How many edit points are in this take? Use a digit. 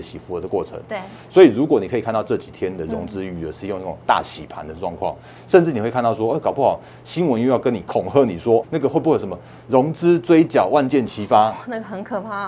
1